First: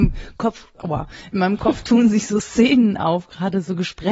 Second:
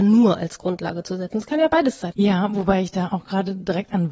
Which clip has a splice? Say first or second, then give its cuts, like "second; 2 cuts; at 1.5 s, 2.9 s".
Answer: second; 1 cut; at 2.1 s